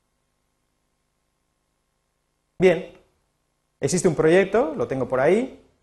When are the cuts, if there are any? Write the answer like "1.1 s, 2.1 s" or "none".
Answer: none